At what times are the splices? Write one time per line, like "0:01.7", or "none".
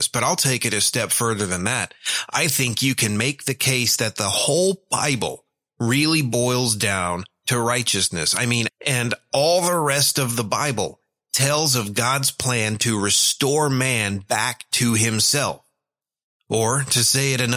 0:08.7